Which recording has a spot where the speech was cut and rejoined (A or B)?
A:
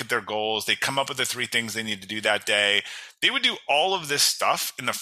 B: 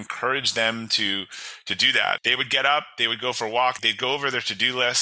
B